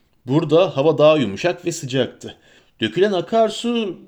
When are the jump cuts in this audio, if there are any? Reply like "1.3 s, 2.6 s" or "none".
2.6 s